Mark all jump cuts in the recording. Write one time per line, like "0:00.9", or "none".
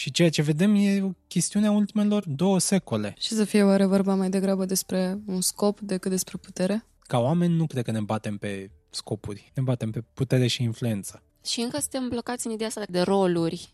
0:07.0
0:11.3